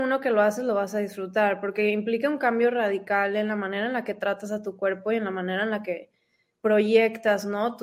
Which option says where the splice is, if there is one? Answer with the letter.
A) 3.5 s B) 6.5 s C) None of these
B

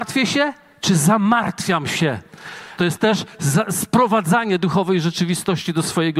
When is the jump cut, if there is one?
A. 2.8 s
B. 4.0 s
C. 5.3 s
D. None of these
A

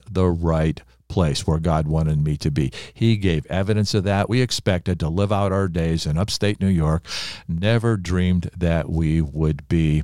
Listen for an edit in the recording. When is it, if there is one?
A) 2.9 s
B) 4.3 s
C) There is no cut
B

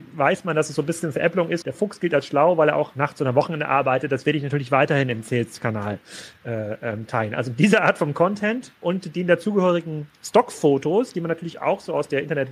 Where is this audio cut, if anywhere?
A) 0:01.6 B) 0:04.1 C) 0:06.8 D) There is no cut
A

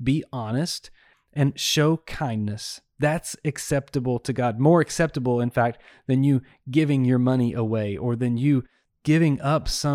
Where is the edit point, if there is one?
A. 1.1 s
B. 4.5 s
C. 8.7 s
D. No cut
A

